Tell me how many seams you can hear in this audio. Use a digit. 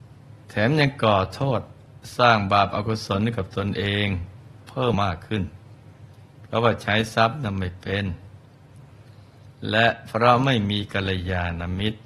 1